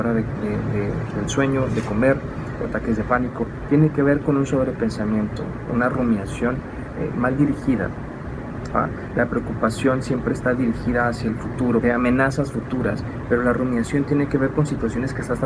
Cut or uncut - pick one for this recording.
cut